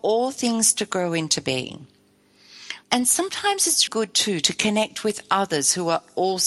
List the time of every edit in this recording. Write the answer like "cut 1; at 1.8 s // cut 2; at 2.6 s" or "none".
cut 1; at 2.8 s // cut 2; at 3.9 s